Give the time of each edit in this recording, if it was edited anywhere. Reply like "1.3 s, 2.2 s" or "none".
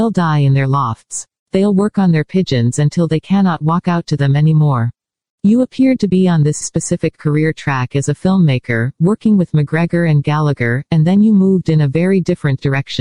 5.3 s, 6.6 s